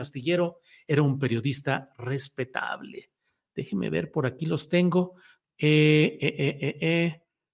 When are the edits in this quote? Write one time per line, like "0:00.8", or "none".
0:05.4